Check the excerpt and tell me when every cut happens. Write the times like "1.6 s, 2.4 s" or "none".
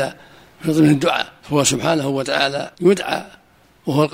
1.4 s, 2.7 s